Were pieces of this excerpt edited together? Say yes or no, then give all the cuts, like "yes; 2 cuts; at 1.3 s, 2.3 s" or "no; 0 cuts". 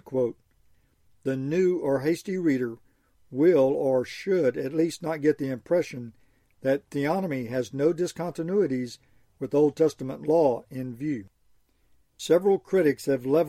no; 0 cuts